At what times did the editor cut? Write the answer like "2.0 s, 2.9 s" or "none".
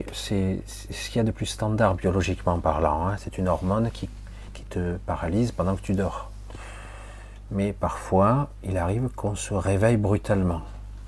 3.2 s